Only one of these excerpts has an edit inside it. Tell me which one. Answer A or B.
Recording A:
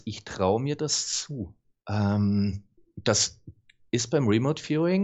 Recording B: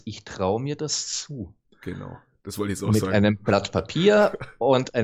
B